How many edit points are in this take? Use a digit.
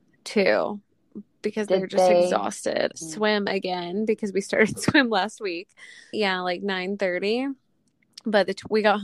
2